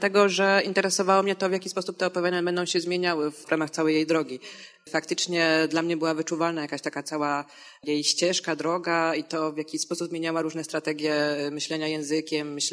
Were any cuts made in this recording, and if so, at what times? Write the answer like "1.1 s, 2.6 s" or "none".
none

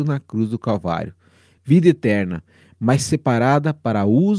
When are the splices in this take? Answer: 1.6 s

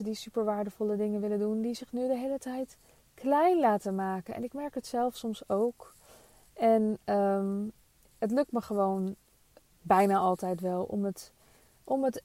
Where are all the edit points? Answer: none

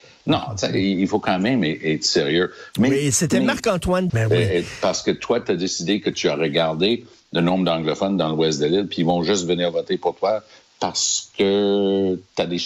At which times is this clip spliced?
4.1 s

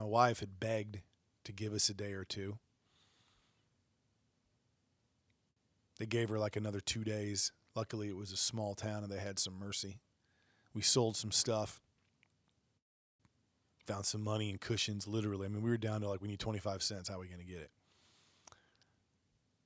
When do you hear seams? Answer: none

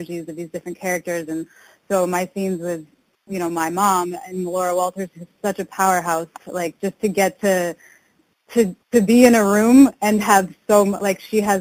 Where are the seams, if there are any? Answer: none

